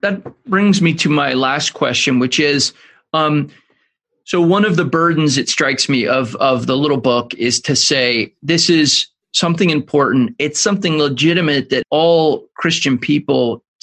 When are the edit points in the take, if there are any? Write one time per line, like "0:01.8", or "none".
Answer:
0:11.8